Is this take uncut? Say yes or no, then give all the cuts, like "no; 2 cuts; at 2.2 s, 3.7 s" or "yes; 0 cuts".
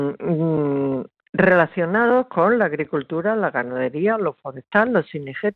yes; 0 cuts